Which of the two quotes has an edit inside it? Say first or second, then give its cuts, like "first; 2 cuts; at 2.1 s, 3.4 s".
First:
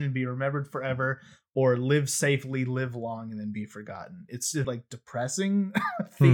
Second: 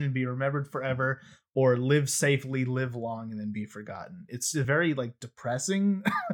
first; 1 cut; at 4.6 s